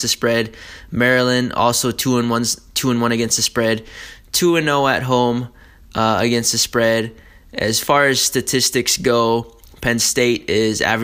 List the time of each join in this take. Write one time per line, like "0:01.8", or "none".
none